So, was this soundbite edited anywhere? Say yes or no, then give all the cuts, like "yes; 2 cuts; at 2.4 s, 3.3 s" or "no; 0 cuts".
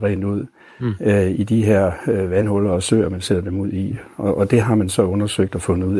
no; 0 cuts